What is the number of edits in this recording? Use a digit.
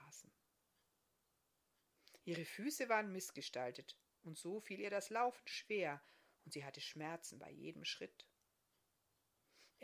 0